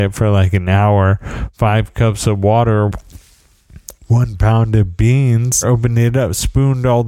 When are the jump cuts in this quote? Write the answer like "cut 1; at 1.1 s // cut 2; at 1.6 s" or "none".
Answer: cut 1; at 5.6 s